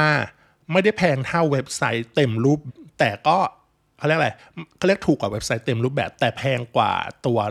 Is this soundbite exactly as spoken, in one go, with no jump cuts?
no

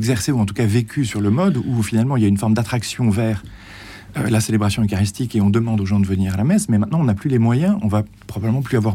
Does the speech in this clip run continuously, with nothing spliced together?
yes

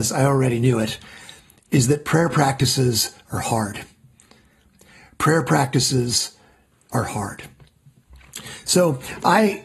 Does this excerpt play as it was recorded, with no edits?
yes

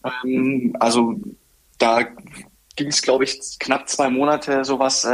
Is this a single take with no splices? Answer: yes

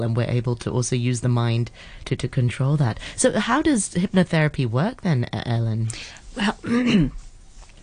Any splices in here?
no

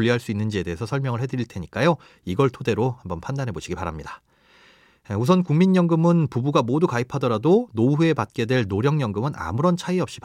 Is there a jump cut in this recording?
no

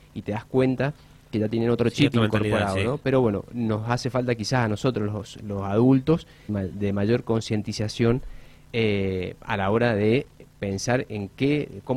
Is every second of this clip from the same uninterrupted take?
no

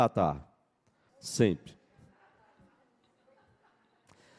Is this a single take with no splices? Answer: no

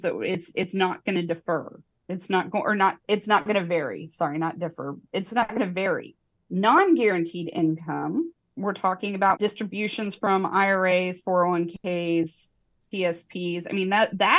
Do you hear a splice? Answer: yes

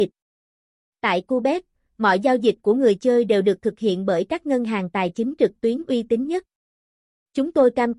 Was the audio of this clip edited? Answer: no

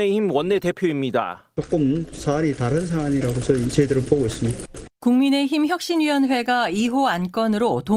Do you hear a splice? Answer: yes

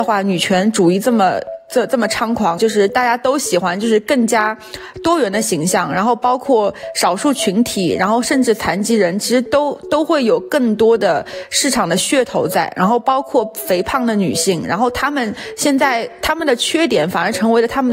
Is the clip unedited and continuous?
no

